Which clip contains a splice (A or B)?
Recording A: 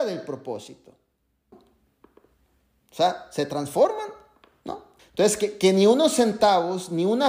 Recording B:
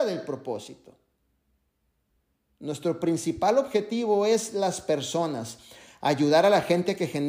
A